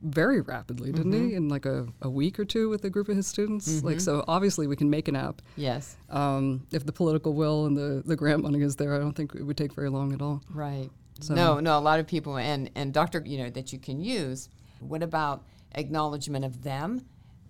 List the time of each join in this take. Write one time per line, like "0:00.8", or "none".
0:13.2
0:14.8

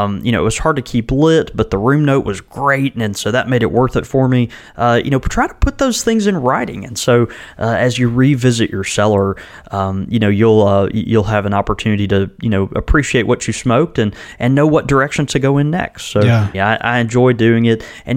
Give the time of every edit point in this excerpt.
0:16.5

